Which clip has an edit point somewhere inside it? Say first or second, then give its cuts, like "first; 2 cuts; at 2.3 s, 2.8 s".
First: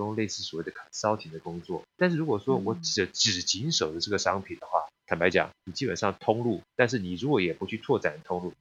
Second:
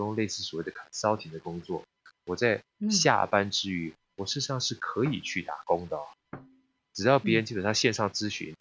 first; 3 cuts; at 1.9 s, 5.0 s, 6.7 s